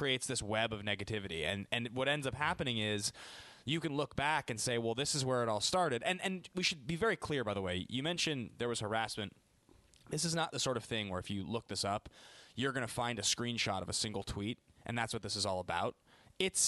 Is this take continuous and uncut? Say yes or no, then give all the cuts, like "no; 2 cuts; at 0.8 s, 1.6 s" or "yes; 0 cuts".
yes; 0 cuts